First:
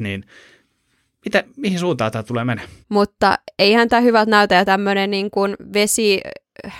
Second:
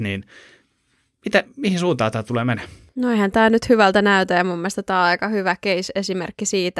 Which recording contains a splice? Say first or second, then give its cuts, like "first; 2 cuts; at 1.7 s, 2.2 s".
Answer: first; 1 cut; at 2.8 s